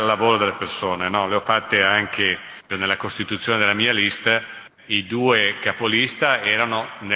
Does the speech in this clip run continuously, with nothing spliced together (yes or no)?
no